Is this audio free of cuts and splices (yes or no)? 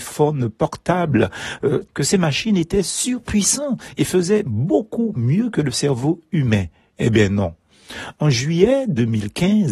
no